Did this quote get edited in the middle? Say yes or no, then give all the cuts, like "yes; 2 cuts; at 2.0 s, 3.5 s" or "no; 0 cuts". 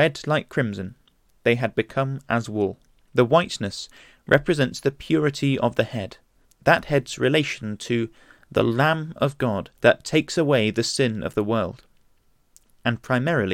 yes; 3 cuts; at 3.1 s, 6.4 s, 9.8 s